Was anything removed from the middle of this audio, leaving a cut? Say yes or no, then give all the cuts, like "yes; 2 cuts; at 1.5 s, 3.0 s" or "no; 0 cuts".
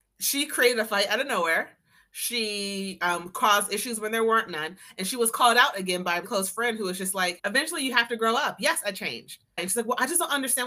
yes; 3 cuts; at 6.2 s, 7.4 s, 9.6 s